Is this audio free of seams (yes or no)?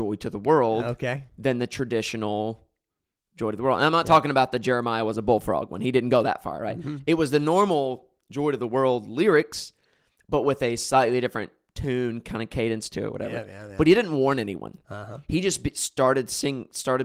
yes